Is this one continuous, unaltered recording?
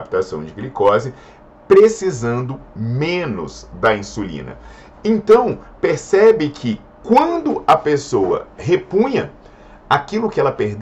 yes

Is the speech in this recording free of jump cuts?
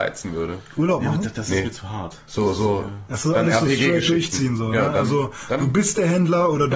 yes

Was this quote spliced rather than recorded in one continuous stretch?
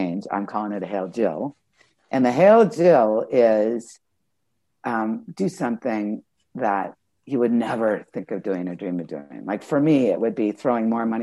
no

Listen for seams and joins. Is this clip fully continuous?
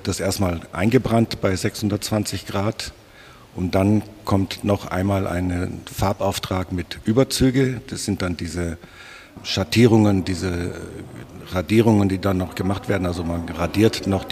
yes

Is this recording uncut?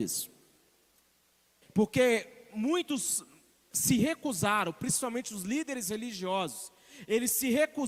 no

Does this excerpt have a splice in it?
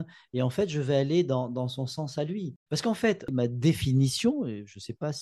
yes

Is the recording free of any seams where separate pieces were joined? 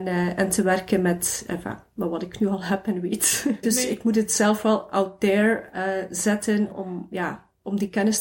no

